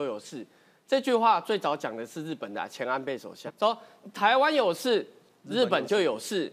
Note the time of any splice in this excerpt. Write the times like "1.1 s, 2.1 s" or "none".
3.5 s